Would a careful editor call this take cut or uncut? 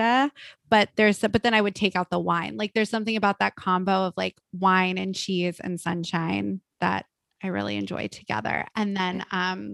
uncut